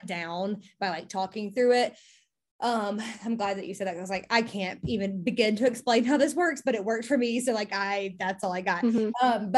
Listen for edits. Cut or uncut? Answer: uncut